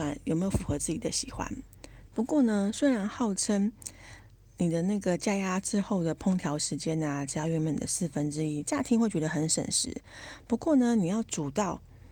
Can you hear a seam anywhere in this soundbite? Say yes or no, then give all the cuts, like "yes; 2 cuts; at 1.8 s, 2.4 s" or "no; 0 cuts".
yes; 1 cut; at 2.1 s